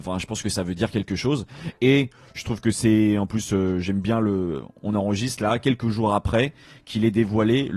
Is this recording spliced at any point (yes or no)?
no